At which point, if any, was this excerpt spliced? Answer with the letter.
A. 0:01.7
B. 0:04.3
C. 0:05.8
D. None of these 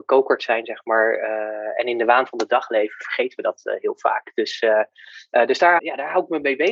C